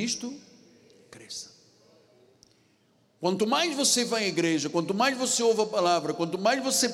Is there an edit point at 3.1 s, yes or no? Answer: no